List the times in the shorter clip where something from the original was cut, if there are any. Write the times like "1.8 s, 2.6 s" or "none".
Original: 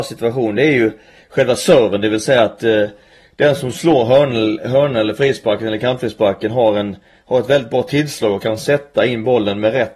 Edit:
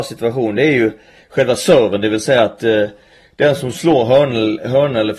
none